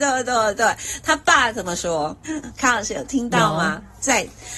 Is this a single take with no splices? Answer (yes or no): no